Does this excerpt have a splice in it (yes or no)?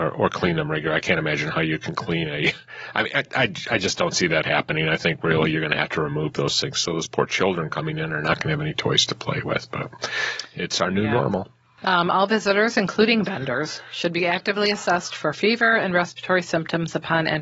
no